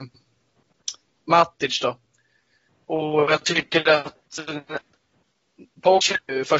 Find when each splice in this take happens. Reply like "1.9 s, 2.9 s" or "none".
none